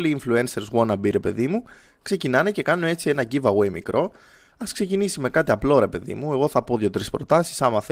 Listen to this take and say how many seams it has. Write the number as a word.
zero